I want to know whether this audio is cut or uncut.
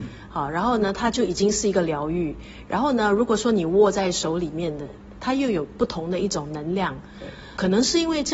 uncut